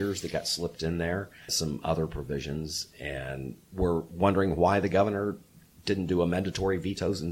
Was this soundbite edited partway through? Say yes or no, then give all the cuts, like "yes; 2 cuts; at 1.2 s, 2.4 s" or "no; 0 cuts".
yes; 2 cuts; at 1.5 s, 3.6 s